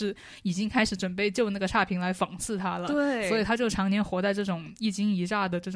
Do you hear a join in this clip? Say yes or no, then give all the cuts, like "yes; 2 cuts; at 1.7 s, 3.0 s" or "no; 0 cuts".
no; 0 cuts